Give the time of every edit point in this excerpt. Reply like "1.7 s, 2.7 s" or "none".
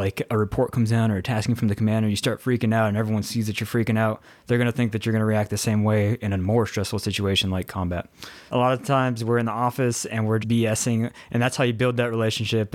8.5 s, 10.4 s